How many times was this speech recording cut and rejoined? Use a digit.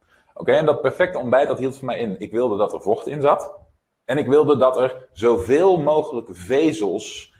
0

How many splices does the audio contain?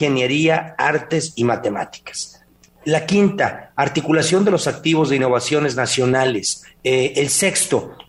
1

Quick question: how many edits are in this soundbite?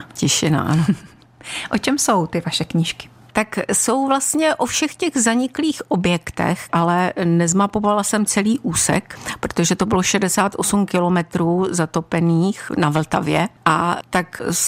1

